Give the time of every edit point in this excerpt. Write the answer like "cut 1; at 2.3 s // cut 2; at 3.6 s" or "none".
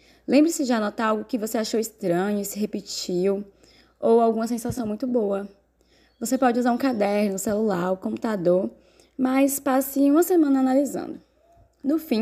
none